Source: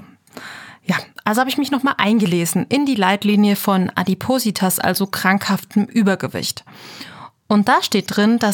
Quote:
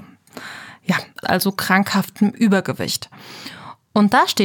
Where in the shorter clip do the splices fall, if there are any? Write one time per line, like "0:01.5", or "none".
0:01.2